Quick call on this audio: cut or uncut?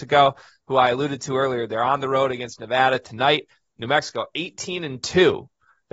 uncut